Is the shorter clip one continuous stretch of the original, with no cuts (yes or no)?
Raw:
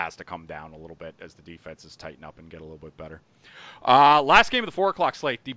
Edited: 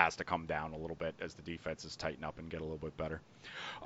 yes